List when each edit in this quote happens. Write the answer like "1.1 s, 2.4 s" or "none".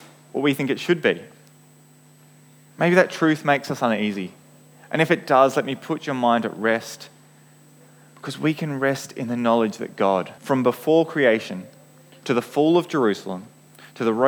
10.4 s